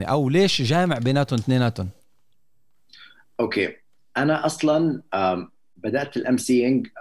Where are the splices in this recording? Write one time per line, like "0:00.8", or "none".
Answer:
none